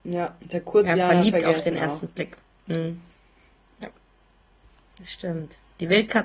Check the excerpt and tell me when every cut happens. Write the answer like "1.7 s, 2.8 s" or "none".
4.9 s